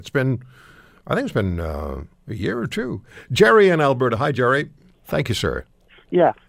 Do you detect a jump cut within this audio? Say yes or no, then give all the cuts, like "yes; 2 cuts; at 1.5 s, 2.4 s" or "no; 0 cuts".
yes; 1 cut; at 4.9 s